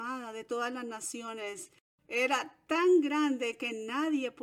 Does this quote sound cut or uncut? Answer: uncut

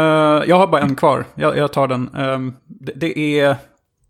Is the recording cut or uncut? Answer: uncut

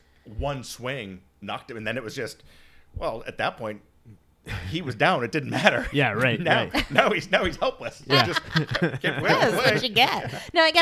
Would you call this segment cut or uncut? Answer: uncut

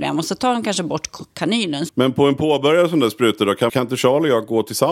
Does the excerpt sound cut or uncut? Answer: cut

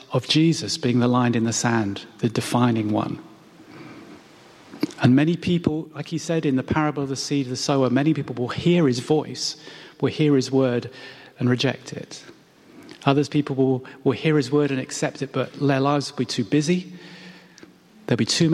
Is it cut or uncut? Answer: uncut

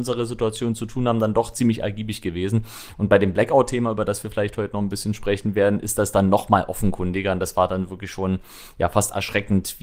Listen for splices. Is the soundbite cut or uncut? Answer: uncut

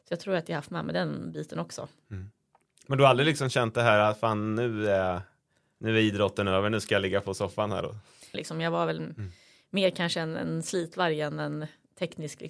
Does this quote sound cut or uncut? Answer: cut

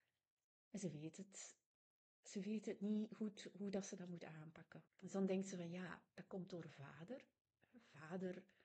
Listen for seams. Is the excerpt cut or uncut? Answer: cut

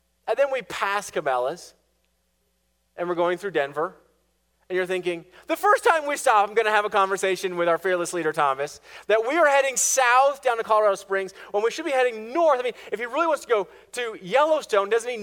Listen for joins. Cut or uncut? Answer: uncut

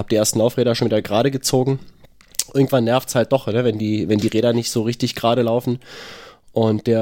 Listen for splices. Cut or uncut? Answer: uncut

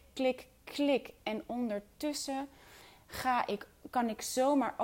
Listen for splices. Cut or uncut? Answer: uncut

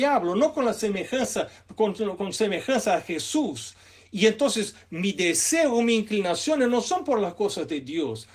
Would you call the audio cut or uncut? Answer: uncut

